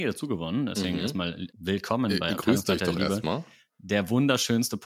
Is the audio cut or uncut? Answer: cut